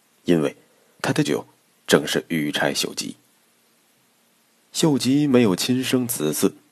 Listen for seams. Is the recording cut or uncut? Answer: cut